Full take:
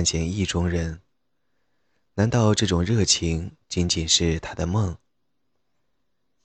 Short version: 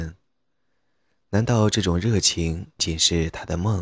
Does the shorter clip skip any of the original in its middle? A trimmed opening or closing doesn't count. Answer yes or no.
yes